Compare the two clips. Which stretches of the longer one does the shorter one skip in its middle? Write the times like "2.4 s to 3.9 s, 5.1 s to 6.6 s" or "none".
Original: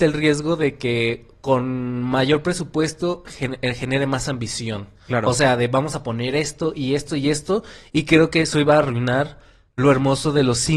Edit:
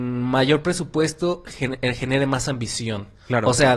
none